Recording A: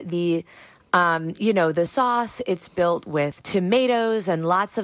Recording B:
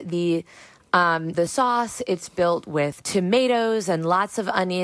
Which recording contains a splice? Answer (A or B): B